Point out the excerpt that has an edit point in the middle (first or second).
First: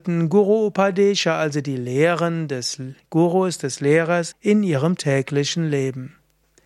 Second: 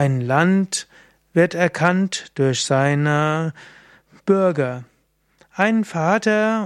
first